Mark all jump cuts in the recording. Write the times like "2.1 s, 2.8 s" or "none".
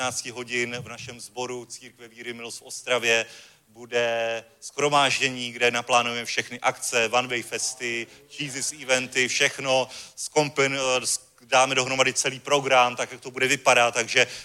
none

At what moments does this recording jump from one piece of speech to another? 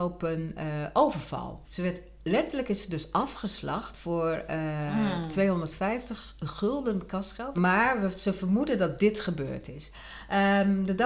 1.6 s, 7.6 s

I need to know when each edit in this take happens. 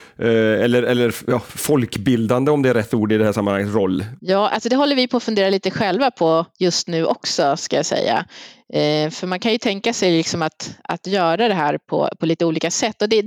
none

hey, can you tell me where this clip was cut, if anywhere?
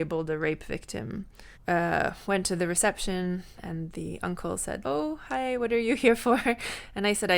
1.5 s, 4.8 s

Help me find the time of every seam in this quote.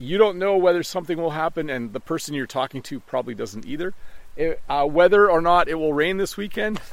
none

